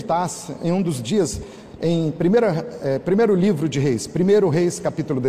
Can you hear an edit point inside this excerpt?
no; 0 cuts

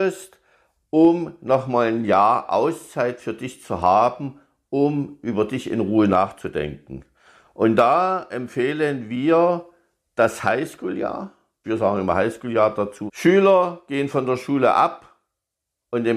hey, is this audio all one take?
no; 2 cuts; at 11.6 s, 13.1 s

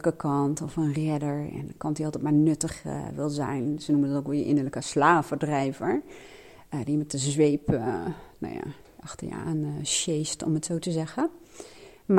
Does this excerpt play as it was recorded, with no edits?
yes; 0 cuts

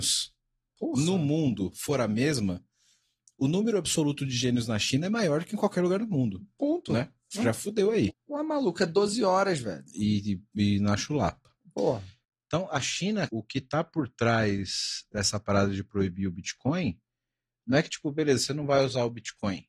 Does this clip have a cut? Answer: yes; 2 cuts; at 8.1 s, 13.3 s

